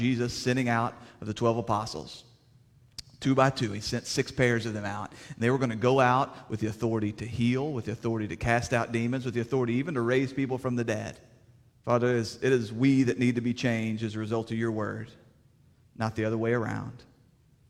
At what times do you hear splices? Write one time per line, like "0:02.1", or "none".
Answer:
0:11.7